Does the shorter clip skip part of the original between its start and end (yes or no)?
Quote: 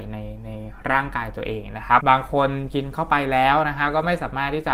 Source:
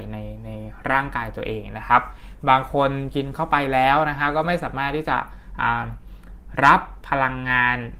yes